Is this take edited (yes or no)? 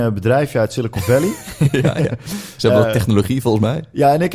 no